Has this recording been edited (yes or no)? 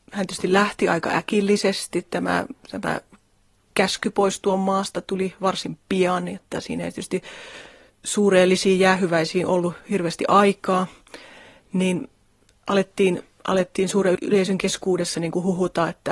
yes